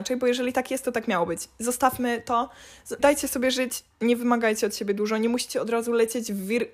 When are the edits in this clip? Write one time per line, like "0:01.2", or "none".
0:03.0